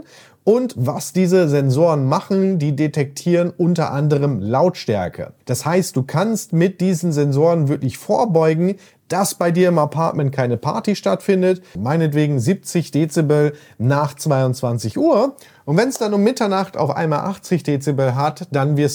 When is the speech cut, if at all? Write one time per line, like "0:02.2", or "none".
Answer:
0:05.4
0:11.8

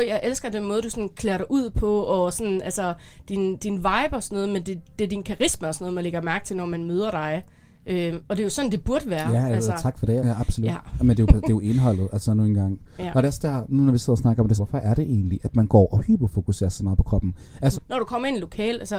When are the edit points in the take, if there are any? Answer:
0:10.2
0:14.6
0:17.7

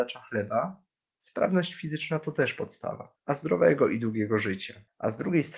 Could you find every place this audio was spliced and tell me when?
0:03.2

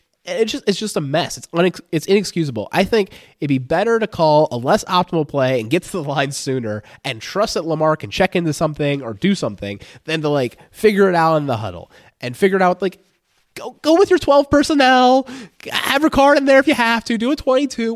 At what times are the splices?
none

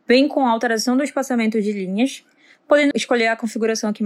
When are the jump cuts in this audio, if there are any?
0:02.9

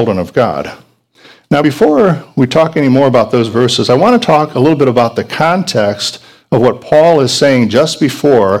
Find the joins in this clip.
none

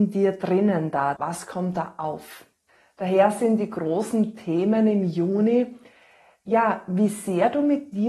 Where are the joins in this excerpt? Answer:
0:01.2

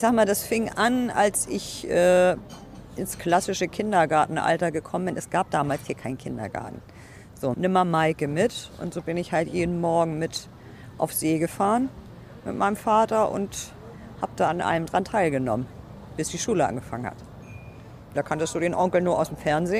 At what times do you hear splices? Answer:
0:07.5
0:18.2

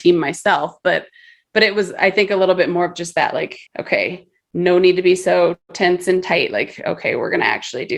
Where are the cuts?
0:03.7

